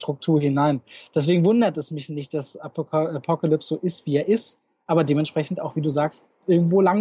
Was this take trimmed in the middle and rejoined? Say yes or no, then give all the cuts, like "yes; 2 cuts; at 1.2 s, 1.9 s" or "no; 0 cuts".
no; 0 cuts